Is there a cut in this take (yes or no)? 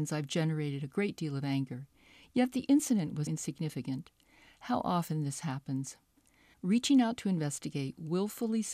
yes